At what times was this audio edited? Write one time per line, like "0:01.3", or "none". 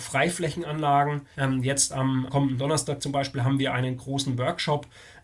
0:01.3